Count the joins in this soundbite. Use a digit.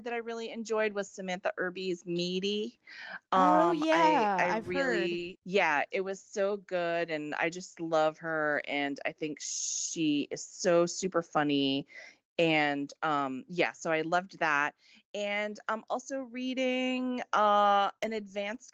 1